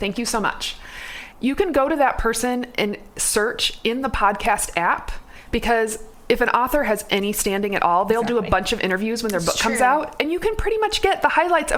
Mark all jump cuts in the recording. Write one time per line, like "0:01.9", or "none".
0:01.3